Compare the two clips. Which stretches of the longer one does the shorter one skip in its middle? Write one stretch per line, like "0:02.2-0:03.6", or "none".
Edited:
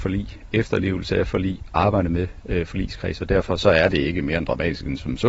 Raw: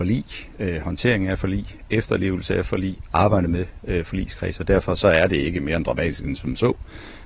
none

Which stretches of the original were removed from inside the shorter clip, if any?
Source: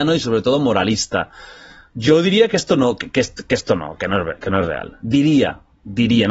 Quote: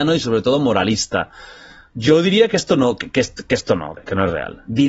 0:04.0-0:04.3

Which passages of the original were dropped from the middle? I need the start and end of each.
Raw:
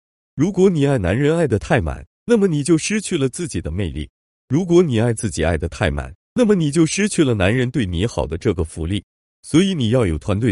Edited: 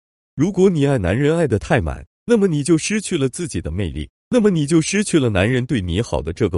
0:04.2-0:06.3

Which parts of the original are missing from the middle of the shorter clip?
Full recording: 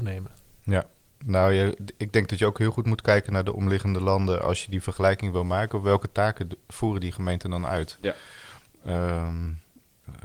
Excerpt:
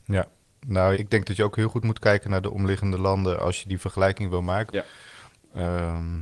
0:01.5-0:02.0
0:05.7-0:08.0

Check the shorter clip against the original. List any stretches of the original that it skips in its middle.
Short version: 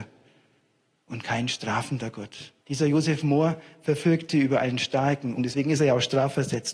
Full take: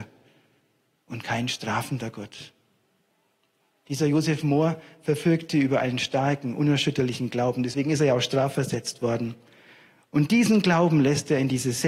0:02.6-0:03.8
0:06.6-0:07.6

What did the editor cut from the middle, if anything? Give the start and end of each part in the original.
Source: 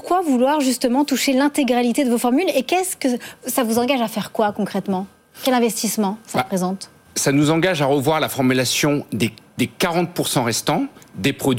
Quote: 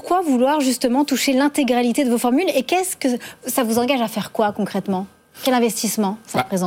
none

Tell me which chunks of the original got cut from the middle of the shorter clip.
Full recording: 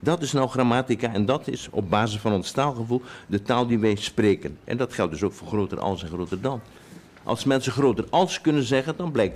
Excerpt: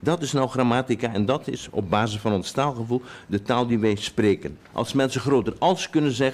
0:04.6-0:07.1

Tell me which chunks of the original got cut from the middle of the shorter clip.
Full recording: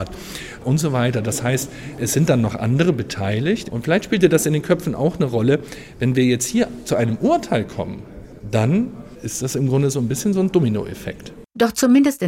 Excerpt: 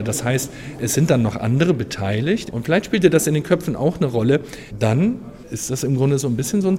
0:05.9-0:08.4

